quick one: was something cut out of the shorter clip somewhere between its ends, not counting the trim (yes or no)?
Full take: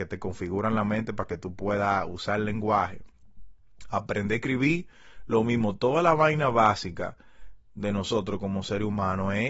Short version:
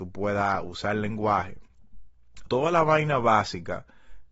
yes